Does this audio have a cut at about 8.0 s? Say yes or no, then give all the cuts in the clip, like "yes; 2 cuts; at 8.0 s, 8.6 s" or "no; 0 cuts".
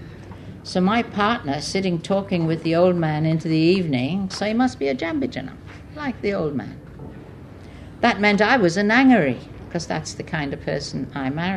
no; 1 cut; at 4.3 s